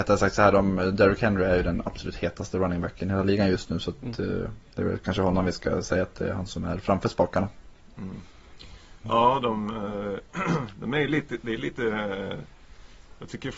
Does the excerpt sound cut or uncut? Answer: uncut